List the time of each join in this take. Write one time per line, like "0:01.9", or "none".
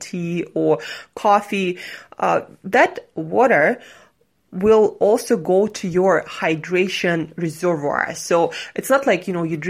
none